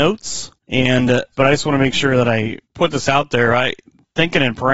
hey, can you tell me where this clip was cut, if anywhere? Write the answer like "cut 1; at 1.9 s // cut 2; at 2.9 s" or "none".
cut 1; at 1.3 s // cut 2; at 2.6 s